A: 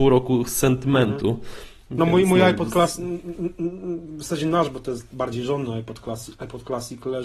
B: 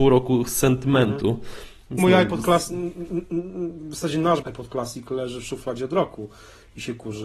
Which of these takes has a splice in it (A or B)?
B